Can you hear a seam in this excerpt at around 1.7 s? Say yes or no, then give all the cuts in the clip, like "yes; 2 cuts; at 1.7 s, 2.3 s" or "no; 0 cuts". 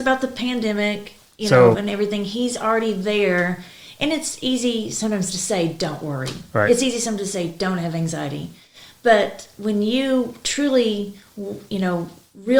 yes; 1 cut; at 1.7 s